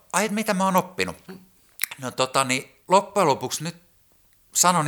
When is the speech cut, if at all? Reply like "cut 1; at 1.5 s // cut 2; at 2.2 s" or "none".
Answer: cut 1; at 2.8 s

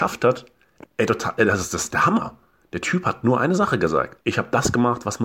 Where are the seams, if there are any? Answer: cut 1; at 4.2 s

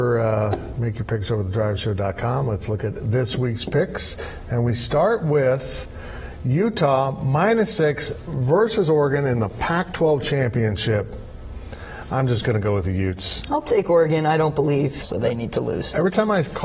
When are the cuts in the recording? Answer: cut 1; at 15.0 s

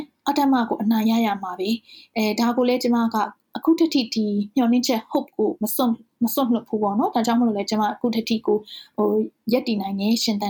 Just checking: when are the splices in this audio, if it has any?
none

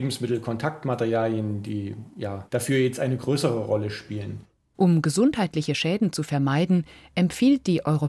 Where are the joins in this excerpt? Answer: cut 1; at 2.5 s

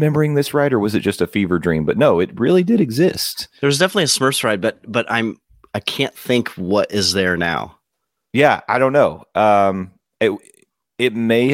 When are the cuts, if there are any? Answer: none

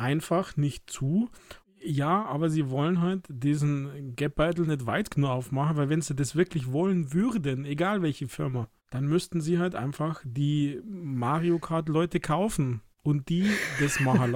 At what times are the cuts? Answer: cut 1; at 1.6 s // cut 2; at 8.8 s // cut 3; at 12.9 s

